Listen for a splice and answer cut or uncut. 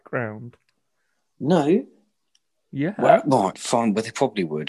cut